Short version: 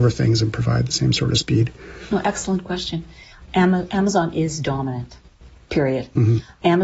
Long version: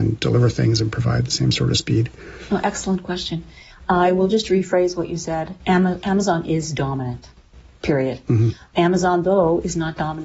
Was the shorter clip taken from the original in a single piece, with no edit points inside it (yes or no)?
no